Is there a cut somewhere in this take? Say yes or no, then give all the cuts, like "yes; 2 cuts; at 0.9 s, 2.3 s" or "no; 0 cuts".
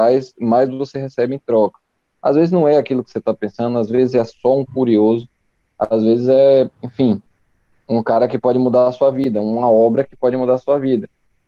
yes; 1 cut; at 6.7 s